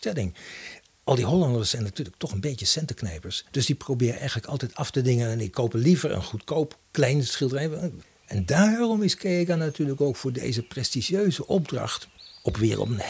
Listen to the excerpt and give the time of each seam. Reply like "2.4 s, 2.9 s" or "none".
8.0 s